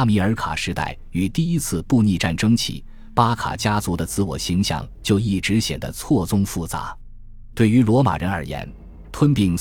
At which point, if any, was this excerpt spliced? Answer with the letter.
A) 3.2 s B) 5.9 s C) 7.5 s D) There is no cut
C